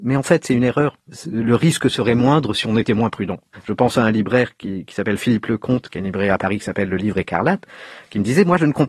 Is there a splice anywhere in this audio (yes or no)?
no